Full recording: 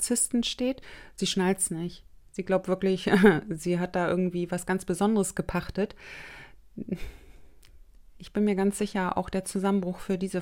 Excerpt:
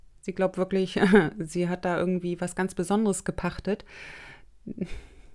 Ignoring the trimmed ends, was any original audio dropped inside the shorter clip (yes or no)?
no